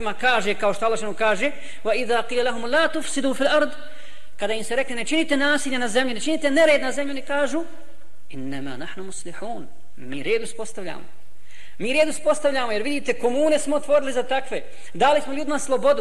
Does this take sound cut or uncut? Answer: uncut